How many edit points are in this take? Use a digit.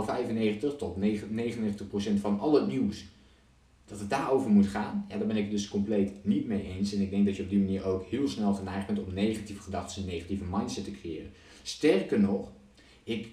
0